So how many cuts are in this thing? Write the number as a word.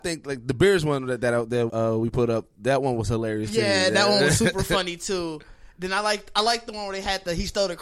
one